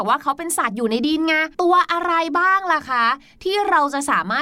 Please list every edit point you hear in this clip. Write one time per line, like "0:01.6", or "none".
0:01.5